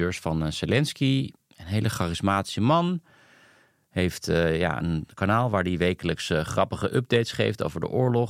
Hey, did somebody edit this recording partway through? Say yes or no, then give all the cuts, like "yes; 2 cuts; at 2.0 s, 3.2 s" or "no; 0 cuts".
no; 0 cuts